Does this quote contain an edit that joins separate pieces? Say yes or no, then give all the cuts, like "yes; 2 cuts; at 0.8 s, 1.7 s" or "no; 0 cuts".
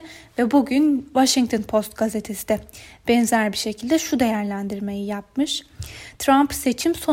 no; 0 cuts